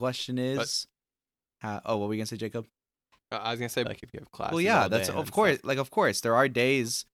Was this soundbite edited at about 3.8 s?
yes; 1 cut; at 3.8 s

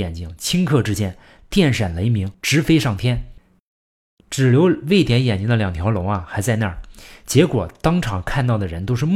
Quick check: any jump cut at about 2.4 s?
yes; 1 cut; at 2.4 s

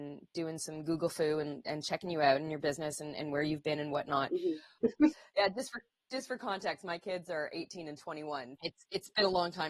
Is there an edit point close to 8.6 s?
yes; 2 cuts; at 4.8 s, 8.6 s

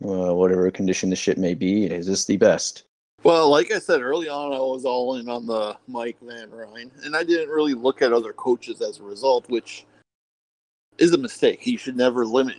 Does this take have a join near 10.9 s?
no; 1 cut; at 1.9 s

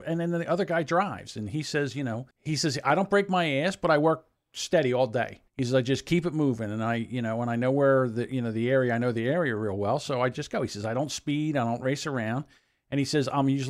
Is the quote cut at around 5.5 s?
yes; 2 cuts; at 2.3 s, 5.5 s

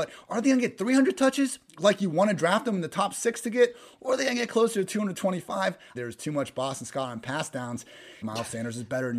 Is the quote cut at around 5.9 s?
yes; 2 cuts; at 5.9 s, 8.2 s

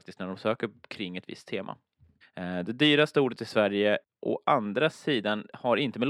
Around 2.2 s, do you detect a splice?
yes; 1 cut; at 2.2 s

